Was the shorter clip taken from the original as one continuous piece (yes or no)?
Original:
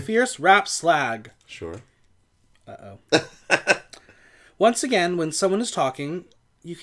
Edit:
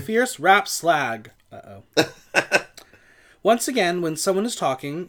no